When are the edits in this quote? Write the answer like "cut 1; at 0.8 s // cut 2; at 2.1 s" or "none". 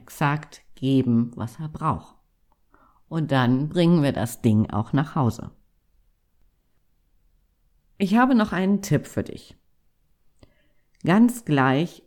none